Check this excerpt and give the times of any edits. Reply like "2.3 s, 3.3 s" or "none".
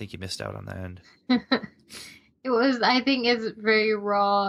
none